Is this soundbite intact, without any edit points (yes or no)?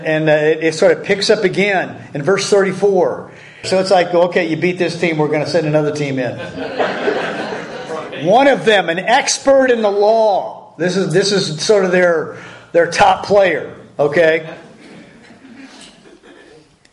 no